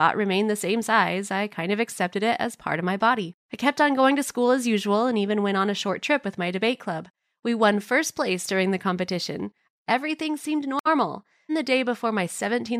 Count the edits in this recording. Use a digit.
3